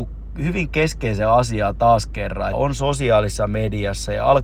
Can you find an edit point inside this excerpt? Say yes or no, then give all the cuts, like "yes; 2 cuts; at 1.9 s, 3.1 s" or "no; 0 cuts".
yes; 1 cut; at 2.5 s